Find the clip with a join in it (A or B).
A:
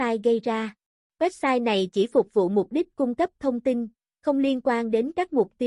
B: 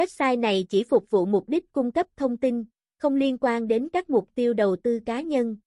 A